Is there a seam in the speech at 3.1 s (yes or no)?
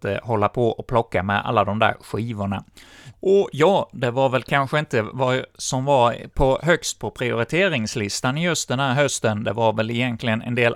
yes